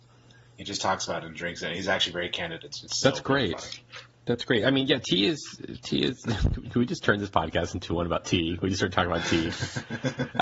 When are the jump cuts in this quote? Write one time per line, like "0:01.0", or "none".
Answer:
none